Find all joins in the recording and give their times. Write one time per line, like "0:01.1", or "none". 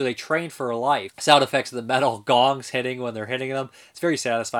0:01.1